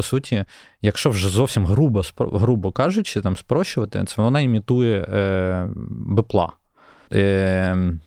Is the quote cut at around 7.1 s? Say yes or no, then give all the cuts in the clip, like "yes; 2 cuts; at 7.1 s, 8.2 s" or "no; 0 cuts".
yes; 1 cut; at 7.1 s